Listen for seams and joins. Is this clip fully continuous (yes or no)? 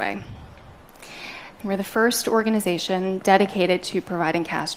no